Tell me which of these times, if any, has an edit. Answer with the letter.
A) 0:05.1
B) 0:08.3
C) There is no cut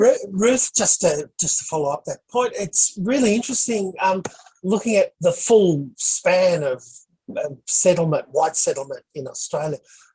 A